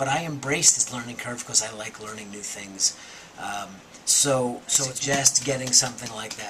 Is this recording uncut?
no; 1 cut; at 4.0 s

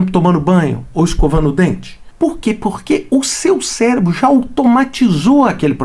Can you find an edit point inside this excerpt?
no; 0 cuts

